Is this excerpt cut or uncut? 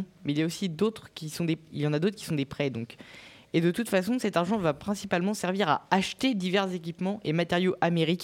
uncut